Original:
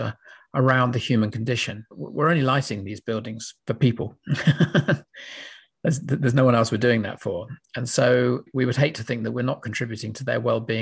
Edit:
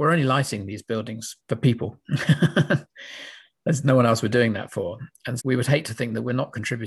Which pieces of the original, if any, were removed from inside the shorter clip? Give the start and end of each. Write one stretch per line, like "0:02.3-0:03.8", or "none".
0:06.0-0:06.3
0:07.9-0:08.5